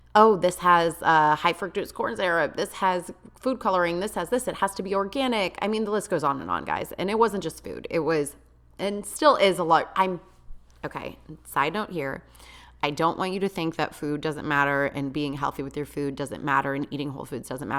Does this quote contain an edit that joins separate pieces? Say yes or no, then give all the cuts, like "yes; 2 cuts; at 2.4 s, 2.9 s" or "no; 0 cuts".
no; 0 cuts